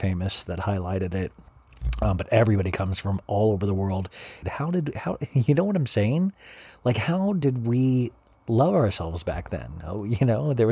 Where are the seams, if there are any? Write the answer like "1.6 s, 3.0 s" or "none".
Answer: 4.4 s